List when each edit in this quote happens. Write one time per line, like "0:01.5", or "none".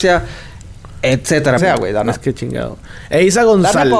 0:01.6